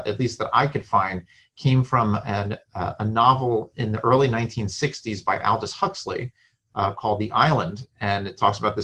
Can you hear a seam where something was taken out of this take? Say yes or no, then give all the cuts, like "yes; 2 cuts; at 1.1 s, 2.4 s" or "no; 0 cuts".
no; 0 cuts